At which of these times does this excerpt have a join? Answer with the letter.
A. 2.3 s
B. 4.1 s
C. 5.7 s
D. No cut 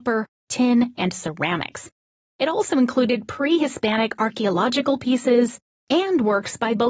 C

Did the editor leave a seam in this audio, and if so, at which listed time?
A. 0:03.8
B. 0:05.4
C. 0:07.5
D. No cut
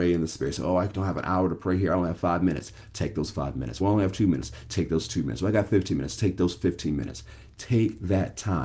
D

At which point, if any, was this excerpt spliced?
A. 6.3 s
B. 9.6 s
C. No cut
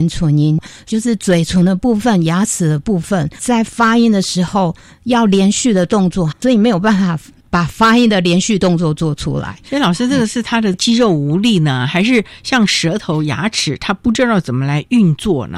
A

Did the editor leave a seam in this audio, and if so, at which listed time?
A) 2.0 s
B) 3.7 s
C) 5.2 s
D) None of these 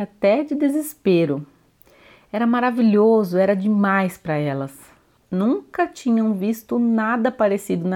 D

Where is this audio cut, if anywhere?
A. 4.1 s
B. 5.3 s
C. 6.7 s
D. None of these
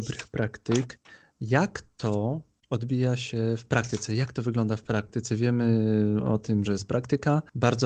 C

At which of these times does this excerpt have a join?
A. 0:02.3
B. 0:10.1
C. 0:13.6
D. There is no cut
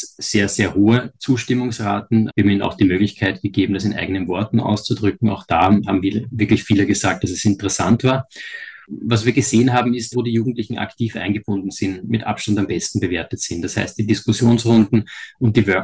B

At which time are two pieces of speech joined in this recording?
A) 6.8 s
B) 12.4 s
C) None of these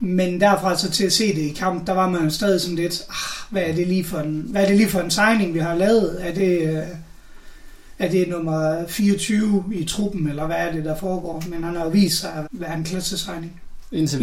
B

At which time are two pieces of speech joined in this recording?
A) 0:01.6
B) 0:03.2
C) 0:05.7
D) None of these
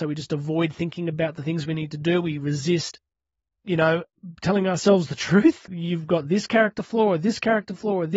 C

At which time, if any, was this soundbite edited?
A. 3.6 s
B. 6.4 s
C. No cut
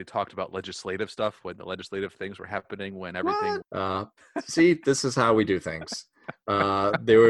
A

